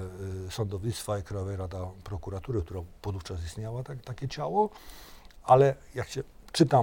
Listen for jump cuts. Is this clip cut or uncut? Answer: uncut